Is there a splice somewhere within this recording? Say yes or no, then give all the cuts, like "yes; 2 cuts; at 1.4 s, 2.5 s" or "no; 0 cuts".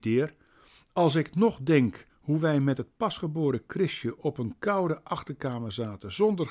no; 0 cuts